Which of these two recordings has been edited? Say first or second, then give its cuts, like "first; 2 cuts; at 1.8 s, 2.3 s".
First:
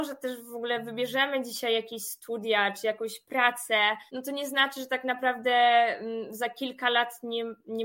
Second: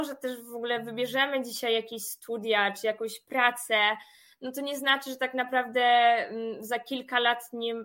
first; 1 cut; at 4.1 s